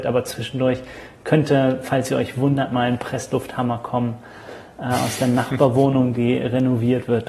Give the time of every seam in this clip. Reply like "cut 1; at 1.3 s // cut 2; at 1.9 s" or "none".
none